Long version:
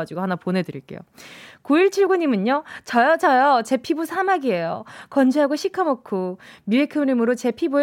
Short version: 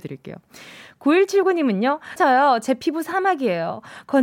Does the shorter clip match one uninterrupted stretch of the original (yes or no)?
no